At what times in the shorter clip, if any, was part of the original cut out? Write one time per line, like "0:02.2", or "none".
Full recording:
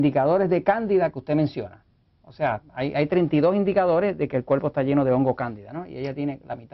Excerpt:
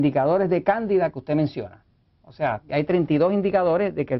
0:02.7